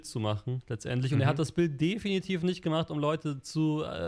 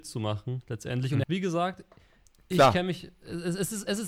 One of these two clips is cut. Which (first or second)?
second